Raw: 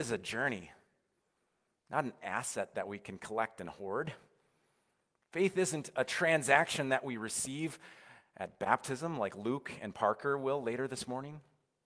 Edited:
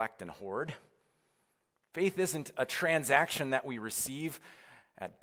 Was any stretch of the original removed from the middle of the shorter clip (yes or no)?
no